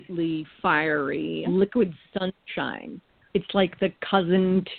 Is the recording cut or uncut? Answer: cut